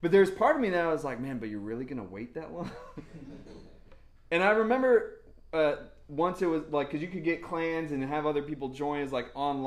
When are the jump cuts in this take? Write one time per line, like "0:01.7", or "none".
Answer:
none